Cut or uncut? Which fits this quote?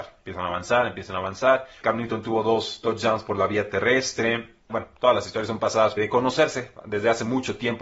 cut